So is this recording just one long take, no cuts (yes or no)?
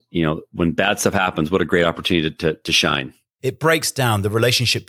no